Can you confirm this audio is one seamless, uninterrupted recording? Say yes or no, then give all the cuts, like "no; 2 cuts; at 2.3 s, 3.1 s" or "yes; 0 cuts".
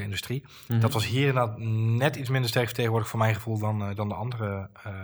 yes; 0 cuts